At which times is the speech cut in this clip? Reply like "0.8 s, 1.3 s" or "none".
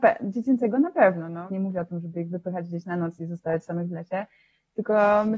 1.5 s